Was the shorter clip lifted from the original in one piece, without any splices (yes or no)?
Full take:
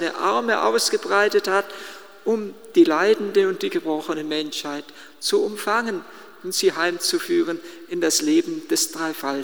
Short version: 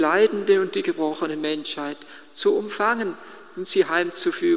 yes